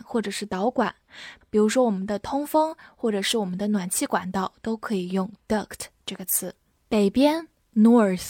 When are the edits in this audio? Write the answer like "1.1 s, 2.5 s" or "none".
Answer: 1.4 s, 6.7 s